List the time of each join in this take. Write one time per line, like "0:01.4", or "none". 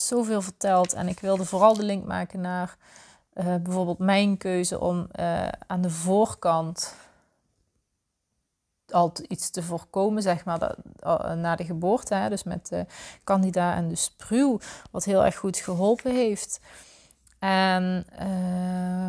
none